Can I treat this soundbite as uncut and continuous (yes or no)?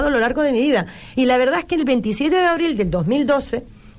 no